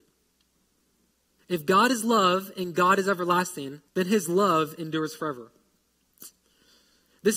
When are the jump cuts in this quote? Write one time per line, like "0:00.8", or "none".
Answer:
0:01.4
0:03.9